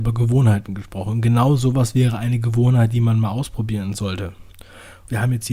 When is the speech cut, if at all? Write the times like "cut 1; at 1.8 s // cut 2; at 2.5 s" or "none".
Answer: none